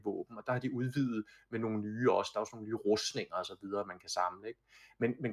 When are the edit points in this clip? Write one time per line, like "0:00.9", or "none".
none